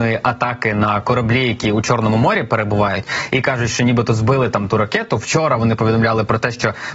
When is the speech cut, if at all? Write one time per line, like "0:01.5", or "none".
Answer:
none